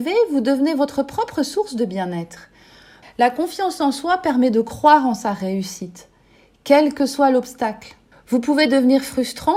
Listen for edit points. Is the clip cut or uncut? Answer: cut